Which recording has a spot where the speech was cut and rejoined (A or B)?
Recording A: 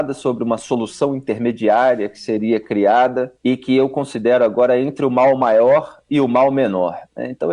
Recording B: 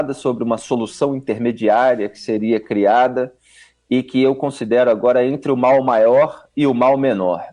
A